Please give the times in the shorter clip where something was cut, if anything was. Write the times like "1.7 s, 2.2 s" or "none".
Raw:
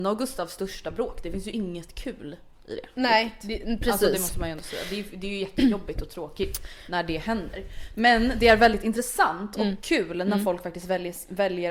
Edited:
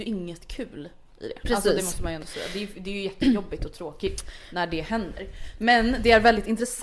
1.4 s